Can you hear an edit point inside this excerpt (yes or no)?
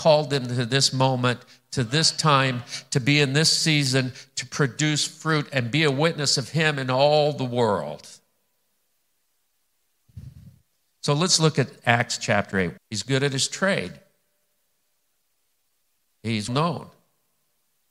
yes